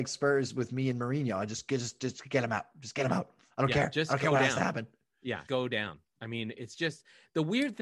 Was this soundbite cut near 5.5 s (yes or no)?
yes